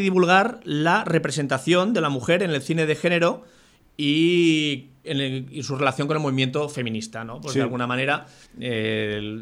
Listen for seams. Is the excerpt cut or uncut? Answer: cut